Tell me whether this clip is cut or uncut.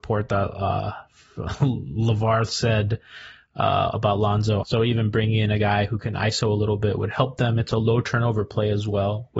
cut